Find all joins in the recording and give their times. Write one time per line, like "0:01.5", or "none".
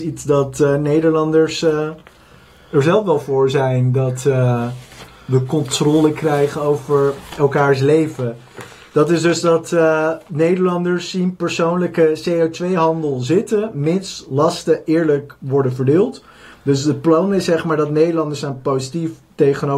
none